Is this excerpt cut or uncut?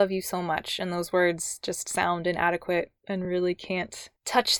uncut